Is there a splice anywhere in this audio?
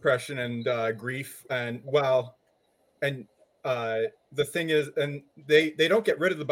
no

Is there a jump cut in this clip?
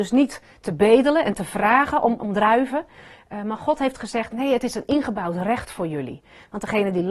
yes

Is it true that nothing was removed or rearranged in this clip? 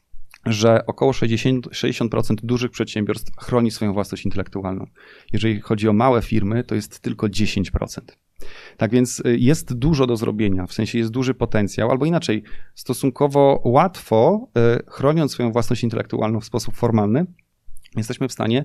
yes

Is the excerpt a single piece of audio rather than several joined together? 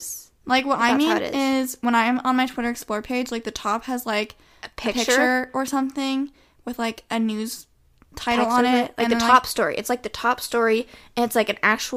yes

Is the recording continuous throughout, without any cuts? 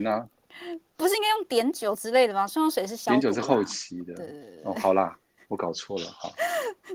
yes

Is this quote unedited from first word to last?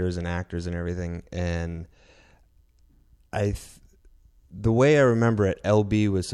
yes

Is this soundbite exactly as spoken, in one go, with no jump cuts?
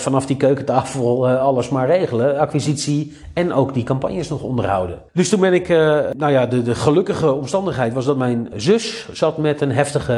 no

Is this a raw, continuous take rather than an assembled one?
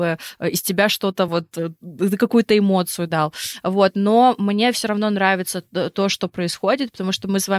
yes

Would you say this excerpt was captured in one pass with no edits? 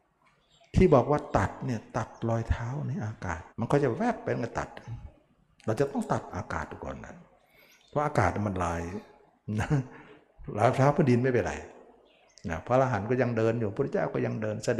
no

